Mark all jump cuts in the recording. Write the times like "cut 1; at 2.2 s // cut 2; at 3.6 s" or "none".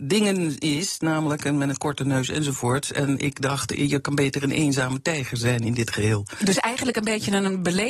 none